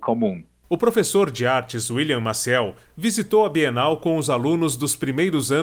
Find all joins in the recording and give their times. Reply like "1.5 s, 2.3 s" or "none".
none